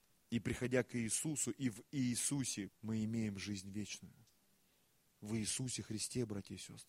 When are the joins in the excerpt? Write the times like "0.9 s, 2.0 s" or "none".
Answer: 2.7 s